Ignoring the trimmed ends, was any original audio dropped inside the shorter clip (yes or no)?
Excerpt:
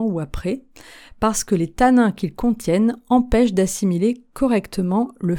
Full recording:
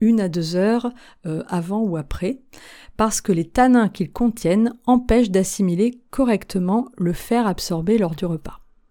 no